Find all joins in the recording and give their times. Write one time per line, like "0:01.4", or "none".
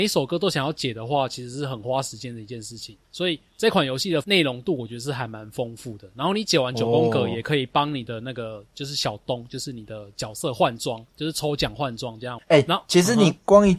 0:12.4